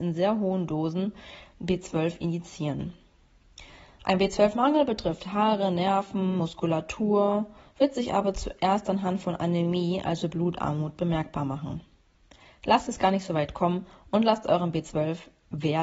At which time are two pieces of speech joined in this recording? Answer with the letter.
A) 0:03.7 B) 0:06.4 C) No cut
C